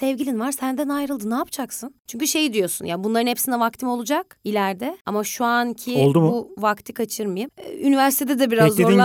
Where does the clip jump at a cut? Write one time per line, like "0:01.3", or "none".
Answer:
0:02.0